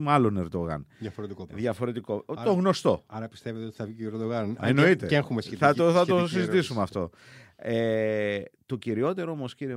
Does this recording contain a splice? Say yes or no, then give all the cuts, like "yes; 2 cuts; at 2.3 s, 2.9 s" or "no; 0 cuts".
no; 0 cuts